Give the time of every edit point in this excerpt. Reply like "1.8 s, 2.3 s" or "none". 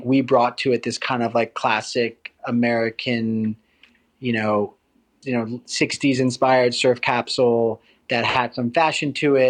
5.2 s